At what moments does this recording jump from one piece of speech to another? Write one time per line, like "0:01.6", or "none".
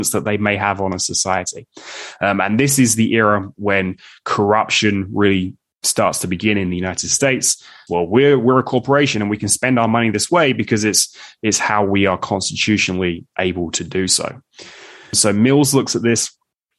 0:07.9
0:15.1

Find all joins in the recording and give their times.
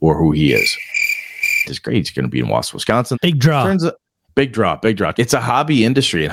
0:01.6
0:03.1
0:05.1

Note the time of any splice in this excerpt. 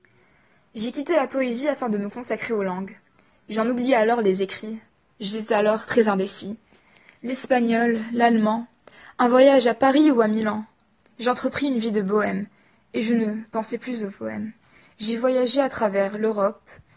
none

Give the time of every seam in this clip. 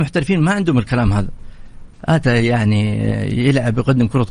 0:01.9

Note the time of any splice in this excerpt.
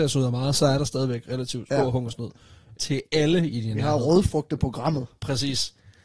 0:02.7

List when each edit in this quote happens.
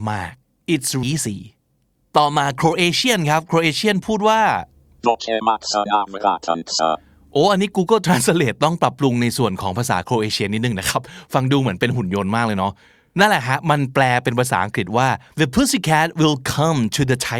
0:01.0

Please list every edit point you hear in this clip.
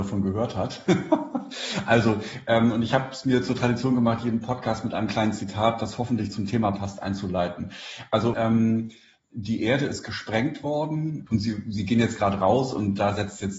0:08.3
0:11.3

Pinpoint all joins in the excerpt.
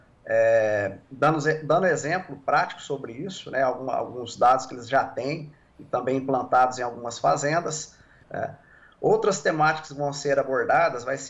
0:08.2

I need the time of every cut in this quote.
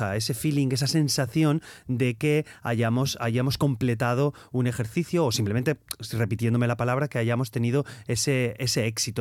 none

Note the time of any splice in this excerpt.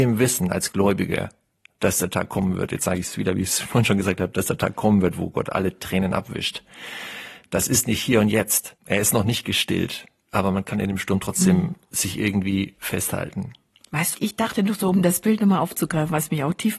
0:08.8
0:14.1

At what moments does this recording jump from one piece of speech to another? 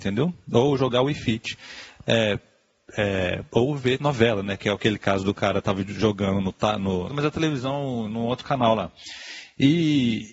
0:07.1

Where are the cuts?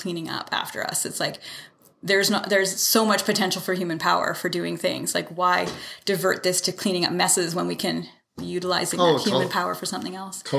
none

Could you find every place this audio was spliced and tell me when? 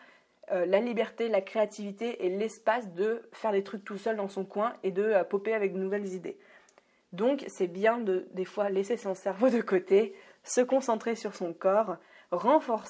none

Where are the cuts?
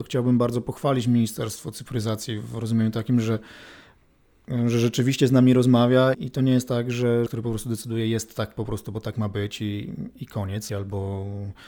0:06.1
0:07.3
0:10.7

